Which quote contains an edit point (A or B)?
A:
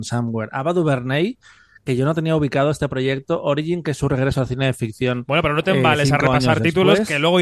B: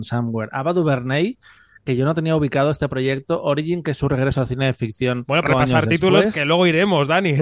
B